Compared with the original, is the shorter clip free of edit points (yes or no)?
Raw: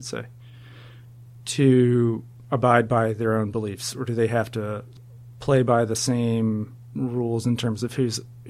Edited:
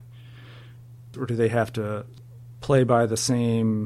no